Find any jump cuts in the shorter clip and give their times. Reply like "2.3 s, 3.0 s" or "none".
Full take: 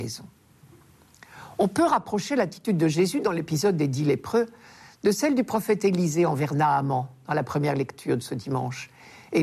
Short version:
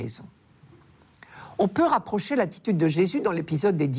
none